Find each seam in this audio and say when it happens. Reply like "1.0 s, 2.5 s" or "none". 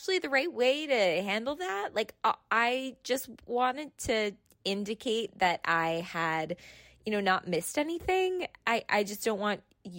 none